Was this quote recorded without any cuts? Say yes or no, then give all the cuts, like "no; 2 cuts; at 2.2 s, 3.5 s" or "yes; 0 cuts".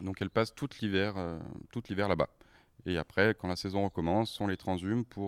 yes; 0 cuts